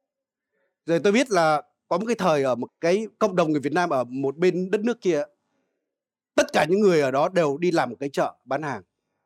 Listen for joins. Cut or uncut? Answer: cut